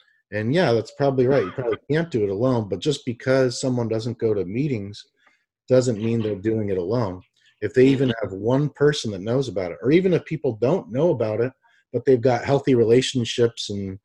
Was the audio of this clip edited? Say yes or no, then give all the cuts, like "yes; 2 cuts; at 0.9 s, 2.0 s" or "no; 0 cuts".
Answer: no; 0 cuts